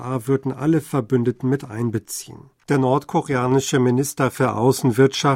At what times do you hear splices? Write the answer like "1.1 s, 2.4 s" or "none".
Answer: 2.6 s